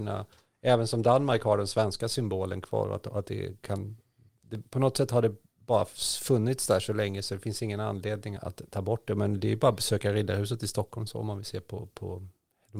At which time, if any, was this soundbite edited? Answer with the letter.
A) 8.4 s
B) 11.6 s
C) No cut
A